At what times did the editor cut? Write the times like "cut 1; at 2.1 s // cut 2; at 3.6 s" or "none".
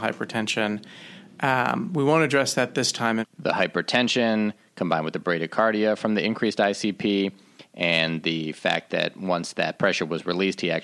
cut 1; at 3.2 s